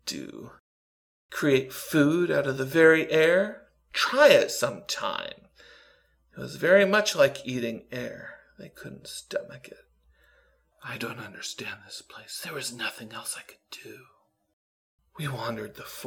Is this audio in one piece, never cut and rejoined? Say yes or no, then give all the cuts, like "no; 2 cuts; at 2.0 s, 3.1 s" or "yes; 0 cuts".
yes; 0 cuts